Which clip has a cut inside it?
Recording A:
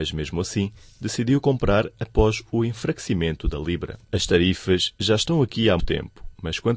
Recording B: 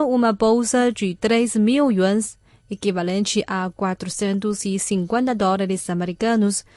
A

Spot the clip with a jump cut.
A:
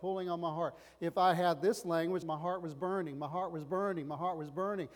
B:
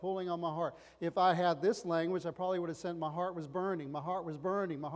A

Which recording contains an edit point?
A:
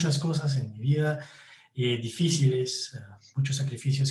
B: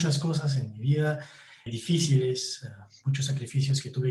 B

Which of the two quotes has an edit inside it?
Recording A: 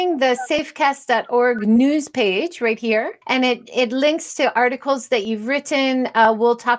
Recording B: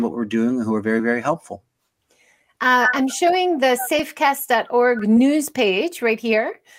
A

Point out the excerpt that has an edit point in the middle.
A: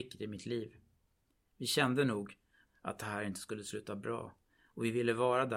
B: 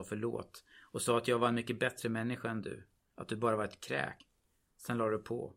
A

